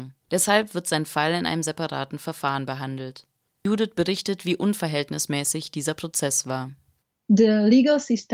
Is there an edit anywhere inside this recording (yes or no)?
no